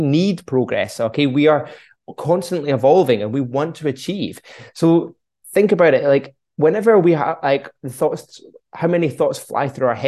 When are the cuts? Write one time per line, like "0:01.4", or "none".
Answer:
none